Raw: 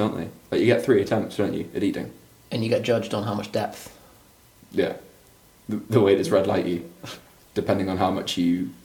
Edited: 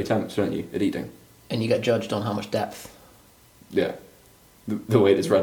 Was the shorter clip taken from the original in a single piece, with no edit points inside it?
yes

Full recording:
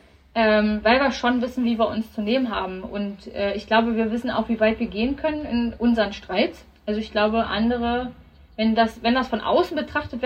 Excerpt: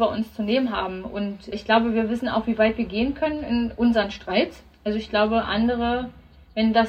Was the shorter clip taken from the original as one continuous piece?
no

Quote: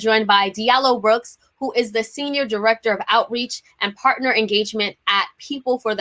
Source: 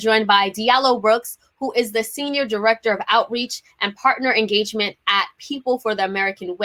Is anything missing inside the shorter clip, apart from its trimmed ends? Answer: no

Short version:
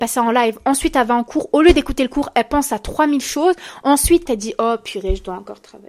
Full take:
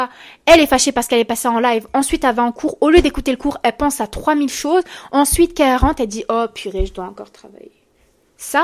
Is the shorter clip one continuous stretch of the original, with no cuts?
no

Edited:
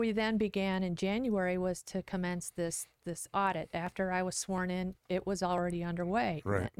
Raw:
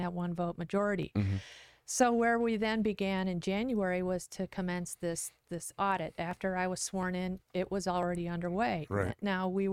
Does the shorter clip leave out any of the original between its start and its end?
no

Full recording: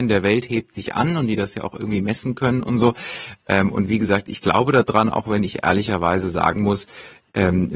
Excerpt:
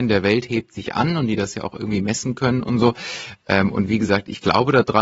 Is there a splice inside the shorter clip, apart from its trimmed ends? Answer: no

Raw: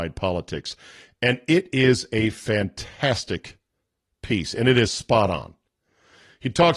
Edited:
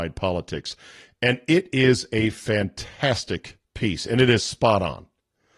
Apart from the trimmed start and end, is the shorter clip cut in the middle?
yes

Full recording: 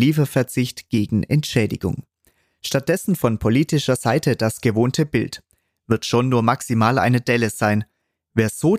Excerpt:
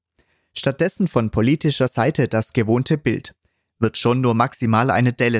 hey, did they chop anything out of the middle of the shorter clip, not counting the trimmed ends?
no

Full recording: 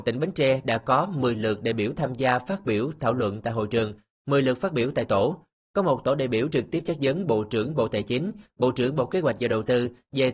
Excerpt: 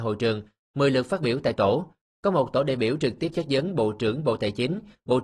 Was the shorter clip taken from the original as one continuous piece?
yes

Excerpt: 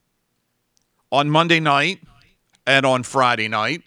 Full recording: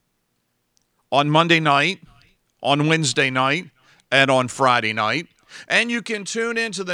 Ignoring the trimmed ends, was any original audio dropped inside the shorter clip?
yes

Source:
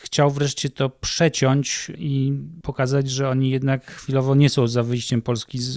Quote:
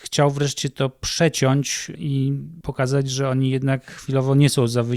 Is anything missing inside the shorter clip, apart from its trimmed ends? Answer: no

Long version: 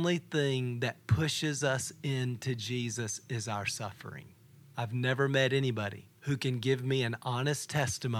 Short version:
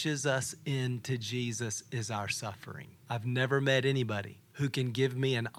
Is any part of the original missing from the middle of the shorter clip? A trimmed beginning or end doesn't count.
yes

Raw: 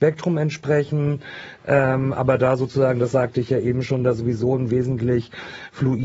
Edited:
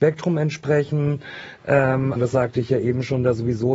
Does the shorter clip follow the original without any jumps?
no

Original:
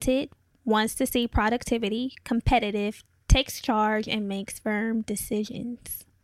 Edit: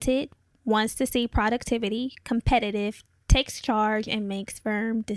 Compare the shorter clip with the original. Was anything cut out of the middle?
no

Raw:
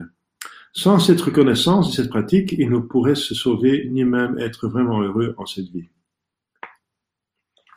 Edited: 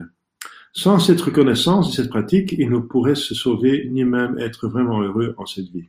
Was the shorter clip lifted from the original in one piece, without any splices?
yes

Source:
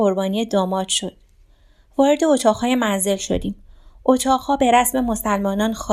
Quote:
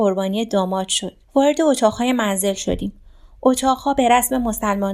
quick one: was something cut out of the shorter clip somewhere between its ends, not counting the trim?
yes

